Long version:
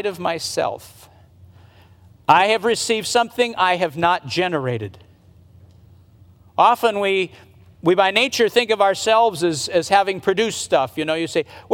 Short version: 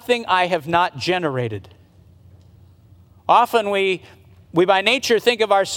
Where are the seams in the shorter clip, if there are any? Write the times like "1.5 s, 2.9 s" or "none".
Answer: none